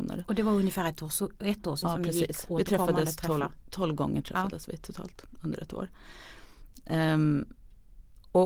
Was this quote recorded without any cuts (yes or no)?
no